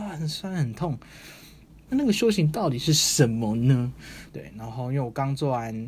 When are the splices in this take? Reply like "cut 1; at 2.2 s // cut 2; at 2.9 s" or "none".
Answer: cut 1; at 1.9 s // cut 2; at 4.3 s